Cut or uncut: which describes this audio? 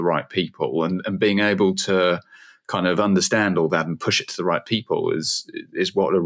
uncut